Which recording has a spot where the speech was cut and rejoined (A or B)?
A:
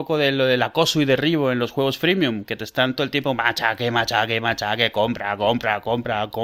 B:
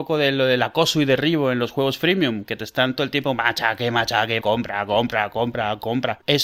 B